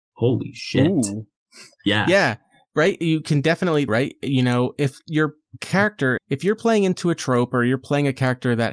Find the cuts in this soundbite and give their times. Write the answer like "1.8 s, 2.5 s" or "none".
3.9 s, 6.2 s